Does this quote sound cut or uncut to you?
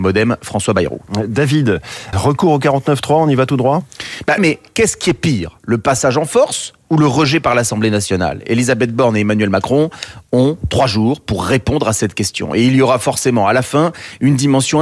cut